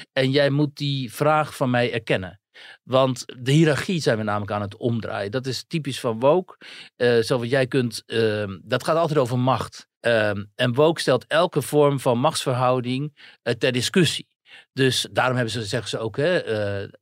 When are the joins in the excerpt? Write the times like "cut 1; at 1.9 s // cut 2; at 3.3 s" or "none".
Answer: cut 1; at 10.0 s